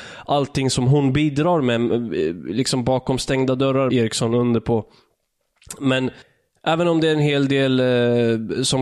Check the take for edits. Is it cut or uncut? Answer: cut